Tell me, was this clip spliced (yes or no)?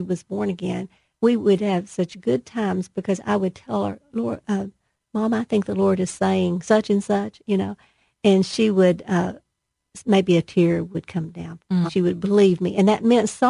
yes